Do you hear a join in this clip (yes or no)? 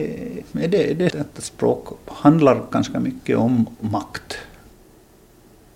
yes